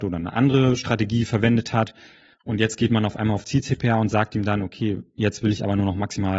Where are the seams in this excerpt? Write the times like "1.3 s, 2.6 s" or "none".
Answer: 2.3 s